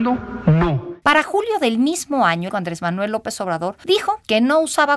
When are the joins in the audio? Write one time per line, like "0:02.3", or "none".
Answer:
0:02.5